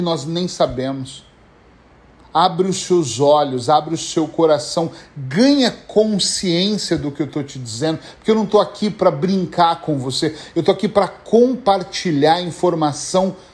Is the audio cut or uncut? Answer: uncut